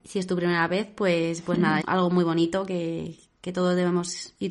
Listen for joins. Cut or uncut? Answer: cut